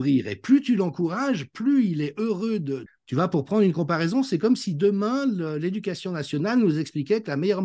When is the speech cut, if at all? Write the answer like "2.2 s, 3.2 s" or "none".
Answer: 2.9 s